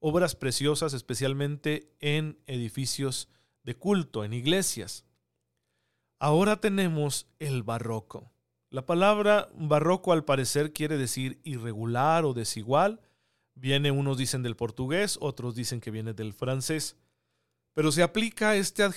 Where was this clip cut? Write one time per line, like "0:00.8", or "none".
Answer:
none